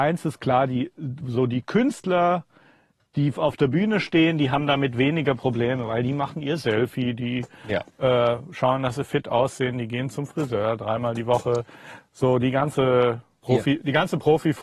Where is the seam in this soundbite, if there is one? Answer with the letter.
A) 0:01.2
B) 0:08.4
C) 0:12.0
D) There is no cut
D